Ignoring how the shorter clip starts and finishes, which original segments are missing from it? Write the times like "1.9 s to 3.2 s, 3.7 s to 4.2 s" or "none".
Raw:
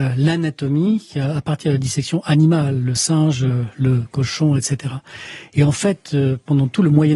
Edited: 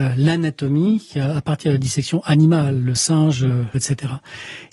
3.7 s to 4.6 s